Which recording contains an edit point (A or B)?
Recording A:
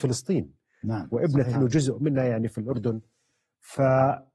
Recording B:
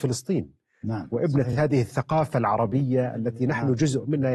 A